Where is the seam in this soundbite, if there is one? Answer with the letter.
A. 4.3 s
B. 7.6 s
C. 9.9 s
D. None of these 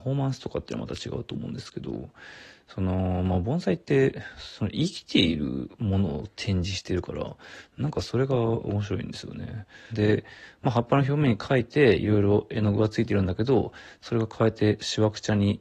C